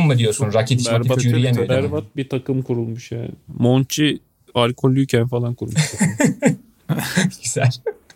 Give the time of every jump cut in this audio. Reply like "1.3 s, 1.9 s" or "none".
none